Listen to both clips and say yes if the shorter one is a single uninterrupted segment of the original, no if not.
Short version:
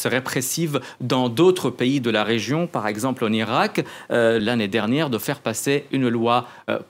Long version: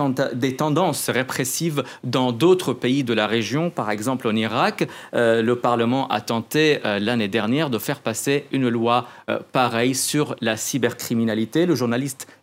no